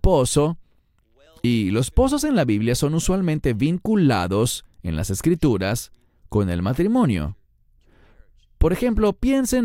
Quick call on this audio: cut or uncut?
uncut